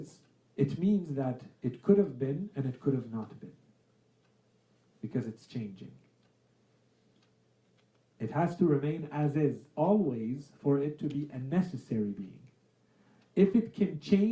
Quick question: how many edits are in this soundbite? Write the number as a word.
zero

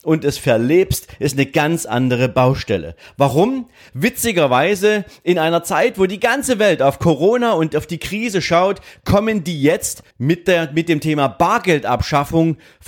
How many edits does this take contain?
two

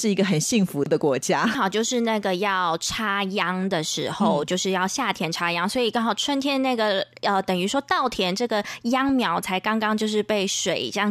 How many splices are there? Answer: one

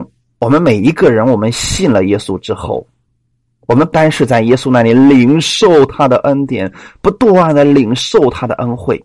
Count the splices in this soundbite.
one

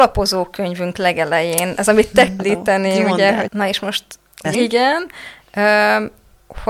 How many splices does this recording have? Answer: three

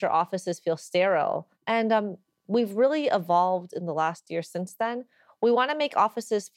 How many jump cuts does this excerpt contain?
one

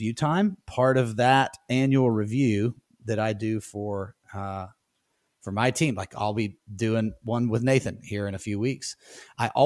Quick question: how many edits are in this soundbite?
zero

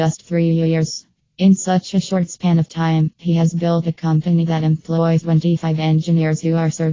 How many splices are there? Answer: zero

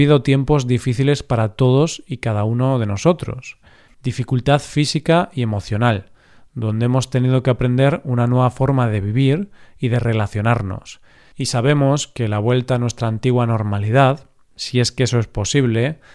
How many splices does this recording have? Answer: zero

